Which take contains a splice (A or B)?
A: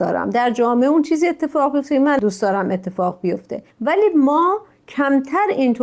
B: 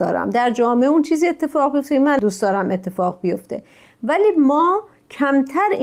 A